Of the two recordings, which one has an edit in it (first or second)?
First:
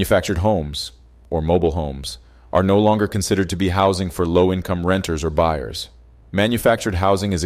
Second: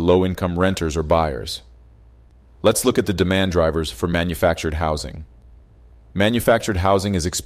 first